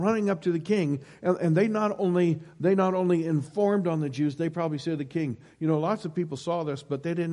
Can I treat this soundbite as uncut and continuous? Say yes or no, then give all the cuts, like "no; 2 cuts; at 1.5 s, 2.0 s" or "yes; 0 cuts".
yes; 0 cuts